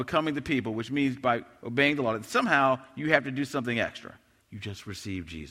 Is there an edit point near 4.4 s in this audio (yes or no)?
yes